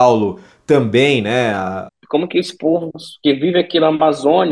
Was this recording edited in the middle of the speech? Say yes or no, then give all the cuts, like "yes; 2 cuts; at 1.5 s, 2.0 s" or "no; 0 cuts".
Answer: yes; 1 cut; at 1.9 s